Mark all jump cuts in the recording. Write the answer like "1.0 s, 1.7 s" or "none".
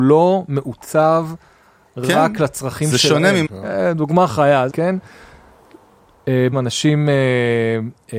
3.5 s, 4.7 s, 6.5 s